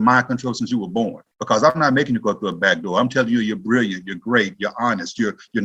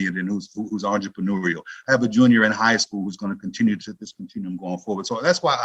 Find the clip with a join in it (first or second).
first